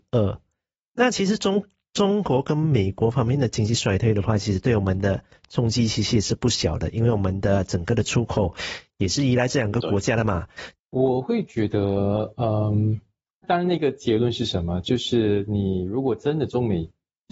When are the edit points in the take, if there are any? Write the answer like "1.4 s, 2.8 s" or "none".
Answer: 10.8 s